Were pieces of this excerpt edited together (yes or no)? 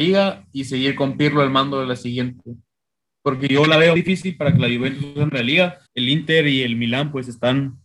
yes